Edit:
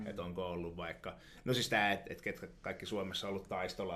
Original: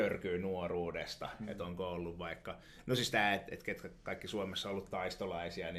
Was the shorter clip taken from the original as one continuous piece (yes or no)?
yes